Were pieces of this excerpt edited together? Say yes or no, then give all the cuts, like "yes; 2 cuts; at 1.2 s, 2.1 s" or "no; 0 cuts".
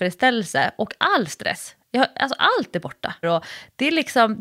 yes; 1 cut; at 3.2 s